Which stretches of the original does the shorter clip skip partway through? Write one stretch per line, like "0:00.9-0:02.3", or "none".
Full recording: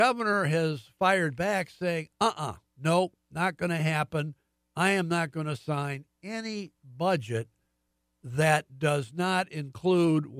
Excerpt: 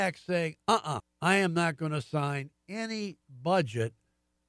0:02.5-0:04.5